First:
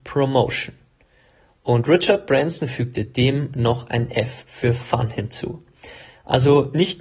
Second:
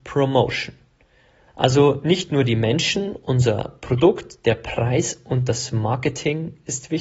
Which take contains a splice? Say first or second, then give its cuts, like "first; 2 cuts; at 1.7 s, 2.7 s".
second; 1 cut; at 1.5 s